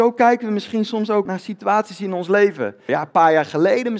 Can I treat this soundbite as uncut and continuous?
no; 2 cuts; at 1.3 s, 2.9 s

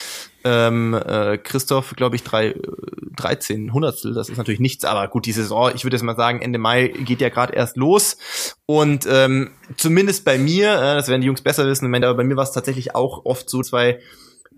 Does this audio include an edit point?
yes; 2 cuts; at 12.0 s, 13.6 s

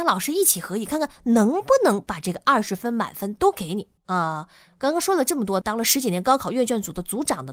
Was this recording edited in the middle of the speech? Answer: yes; 2 cuts; at 4.0 s, 5.6 s

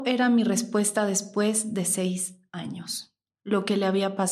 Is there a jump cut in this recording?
no; 0 cuts

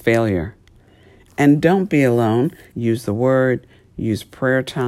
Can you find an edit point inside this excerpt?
yes; 2 cuts; at 1.3 s, 2.7 s

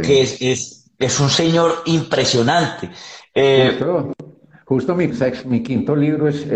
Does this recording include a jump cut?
yes; 1 cut; at 5.1 s

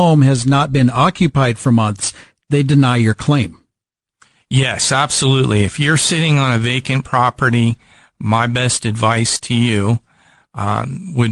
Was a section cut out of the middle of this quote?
no; 0 cuts

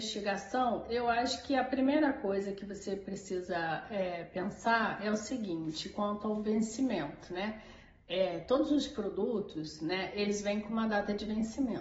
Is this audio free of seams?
yes; 0 cuts

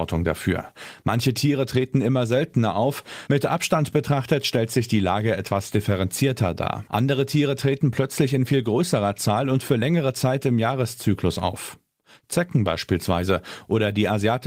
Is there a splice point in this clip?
yes; 2 cuts; at 3.3 s, 6.9 s

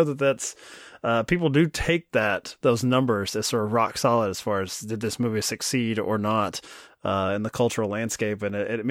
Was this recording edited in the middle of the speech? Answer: no; 0 cuts

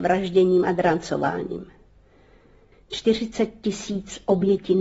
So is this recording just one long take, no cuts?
no; 1 cut; at 2.7 s

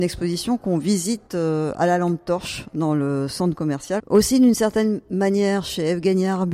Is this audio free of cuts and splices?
no; 1 cut; at 4.0 s

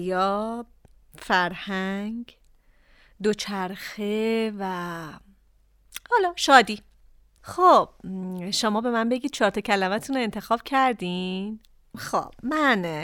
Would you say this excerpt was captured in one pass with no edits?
no; 1 cut; at 7.4 s

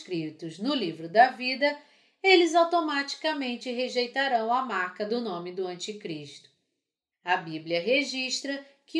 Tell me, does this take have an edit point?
yes; 1 cut; at 7.1 s

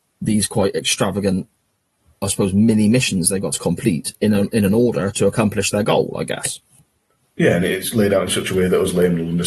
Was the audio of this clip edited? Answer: no; 0 cuts

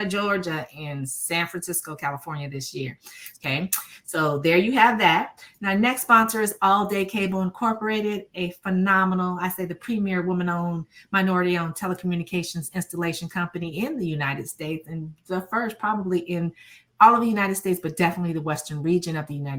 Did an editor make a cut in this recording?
yes; 1 cut; at 3.3 s

